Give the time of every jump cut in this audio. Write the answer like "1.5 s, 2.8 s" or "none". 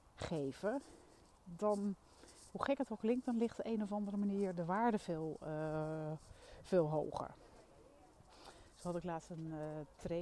none